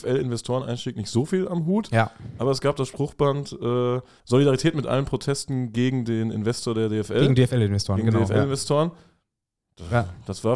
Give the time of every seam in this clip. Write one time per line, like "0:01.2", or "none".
none